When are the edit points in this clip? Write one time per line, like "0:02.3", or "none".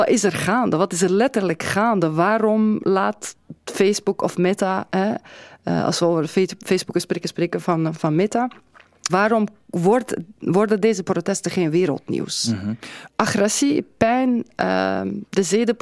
0:09.1
0:13.1

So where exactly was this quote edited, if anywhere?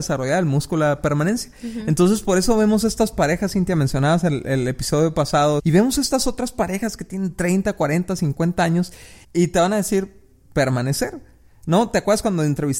0:05.6
0:09.2

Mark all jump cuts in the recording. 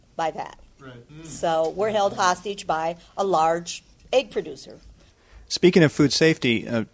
none

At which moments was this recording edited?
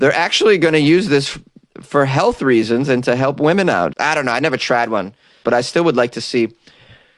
0:03.9
0:05.4

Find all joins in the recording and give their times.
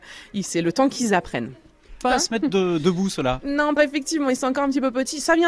0:02.0
0:03.8

